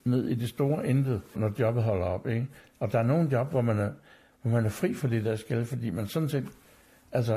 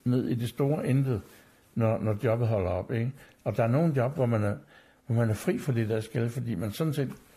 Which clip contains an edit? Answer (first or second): first